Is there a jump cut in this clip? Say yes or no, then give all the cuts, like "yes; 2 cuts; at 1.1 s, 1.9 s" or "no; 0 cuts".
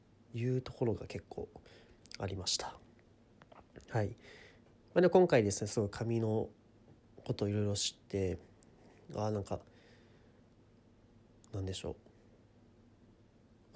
no; 0 cuts